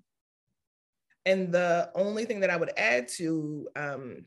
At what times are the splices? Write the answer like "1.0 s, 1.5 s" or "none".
1.1 s